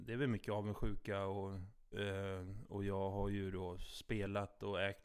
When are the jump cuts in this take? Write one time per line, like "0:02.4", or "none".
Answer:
0:01.9